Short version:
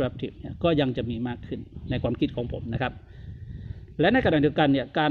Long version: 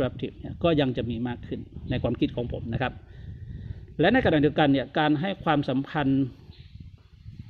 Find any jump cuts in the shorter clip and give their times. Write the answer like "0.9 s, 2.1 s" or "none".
none